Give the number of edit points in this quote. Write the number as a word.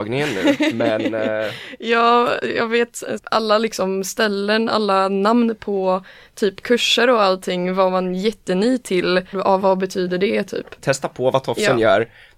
three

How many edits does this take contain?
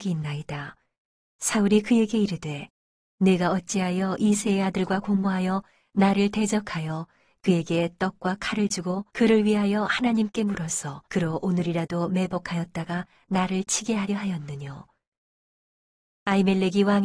two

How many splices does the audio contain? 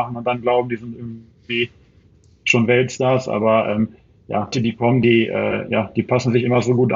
one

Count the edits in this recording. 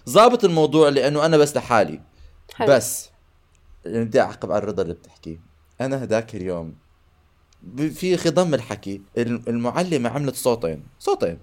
one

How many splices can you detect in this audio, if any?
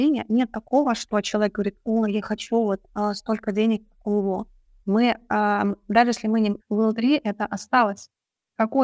two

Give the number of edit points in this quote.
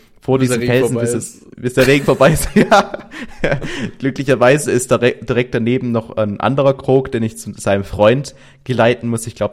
zero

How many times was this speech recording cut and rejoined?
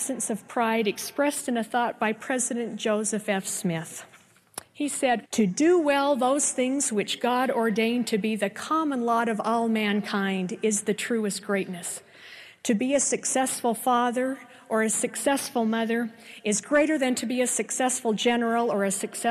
one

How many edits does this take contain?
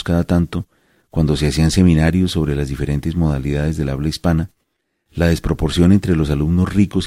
zero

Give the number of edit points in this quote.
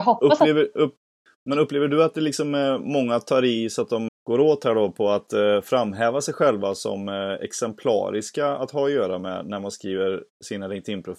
one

